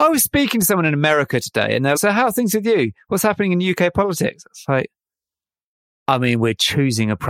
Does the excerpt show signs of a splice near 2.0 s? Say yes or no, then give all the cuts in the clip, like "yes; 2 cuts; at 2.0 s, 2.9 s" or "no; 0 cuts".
yes; 1 cut; at 2.0 s